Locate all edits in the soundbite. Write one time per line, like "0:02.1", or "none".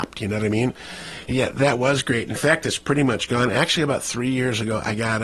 0:01.3